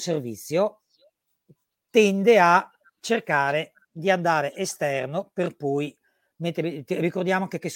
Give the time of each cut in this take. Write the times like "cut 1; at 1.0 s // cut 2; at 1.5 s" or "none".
none